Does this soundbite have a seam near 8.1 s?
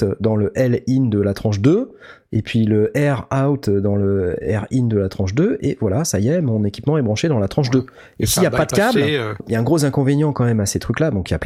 no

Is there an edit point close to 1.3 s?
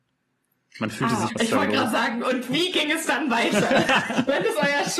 yes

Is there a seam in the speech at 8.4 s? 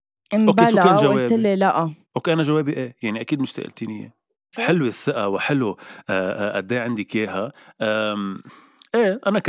no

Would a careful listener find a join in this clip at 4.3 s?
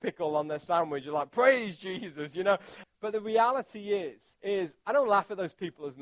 yes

